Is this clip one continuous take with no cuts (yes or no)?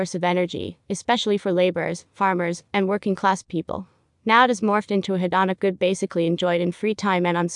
yes